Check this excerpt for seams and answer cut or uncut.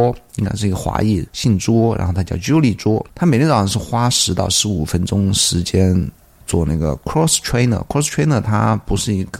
uncut